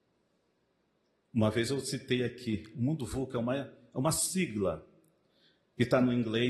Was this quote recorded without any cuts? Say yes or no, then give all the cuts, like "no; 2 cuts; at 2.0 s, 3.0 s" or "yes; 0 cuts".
yes; 0 cuts